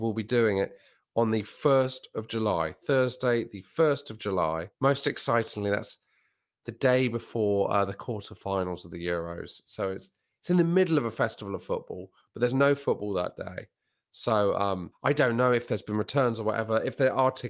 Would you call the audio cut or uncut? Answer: uncut